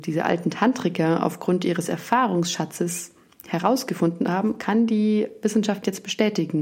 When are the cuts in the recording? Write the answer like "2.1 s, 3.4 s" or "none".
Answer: none